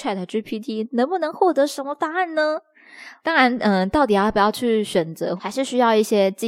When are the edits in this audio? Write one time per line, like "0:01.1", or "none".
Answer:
0:03.2
0:05.4